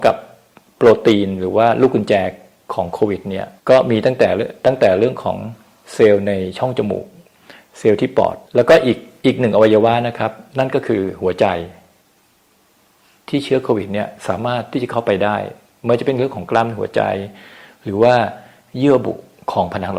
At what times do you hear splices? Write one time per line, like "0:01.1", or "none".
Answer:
0:03.6
0:08.4